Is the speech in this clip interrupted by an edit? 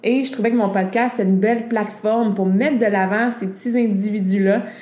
no; 0 cuts

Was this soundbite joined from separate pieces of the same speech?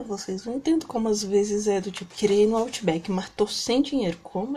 yes; 1 cut; at 2.1 s

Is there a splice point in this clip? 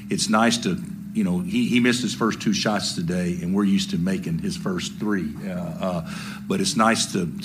no; 0 cuts

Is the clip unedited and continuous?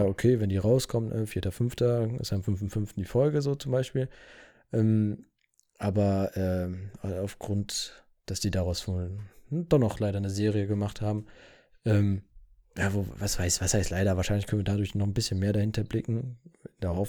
yes; 0 cuts

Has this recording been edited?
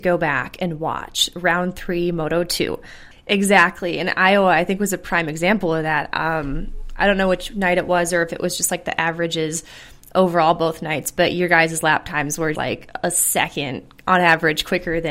yes; 2 cuts; at 3.1 s, 12.5 s

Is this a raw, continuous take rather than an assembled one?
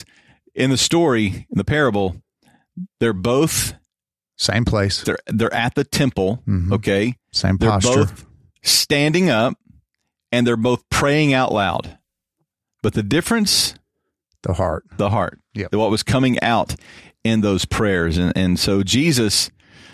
no; 1 cut; at 5.0 s

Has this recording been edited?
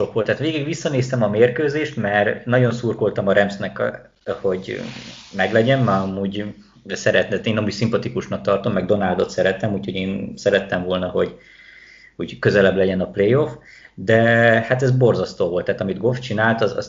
no; 0 cuts

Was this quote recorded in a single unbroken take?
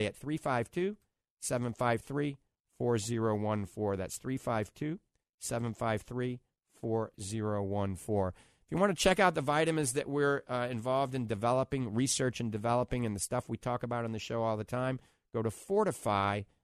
yes; 0 cuts

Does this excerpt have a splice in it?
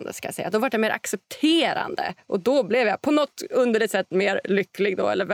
no; 0 cuts

